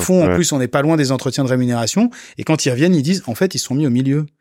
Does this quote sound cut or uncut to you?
uncut